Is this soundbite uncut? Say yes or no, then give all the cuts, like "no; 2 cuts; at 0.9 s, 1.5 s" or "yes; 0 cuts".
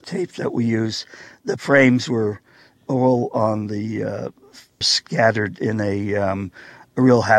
no; 1 cut; at 4.8 s